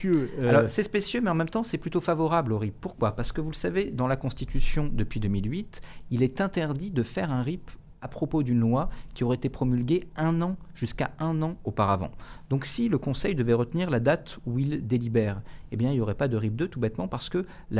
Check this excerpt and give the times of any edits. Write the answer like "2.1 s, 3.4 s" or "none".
none